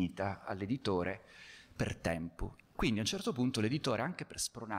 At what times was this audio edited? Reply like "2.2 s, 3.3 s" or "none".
2.6 s